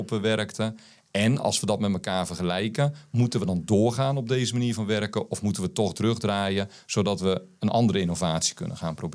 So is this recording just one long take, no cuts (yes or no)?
yes